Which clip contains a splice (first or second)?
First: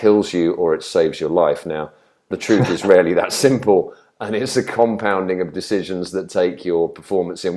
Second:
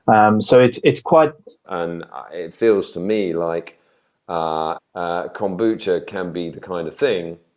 second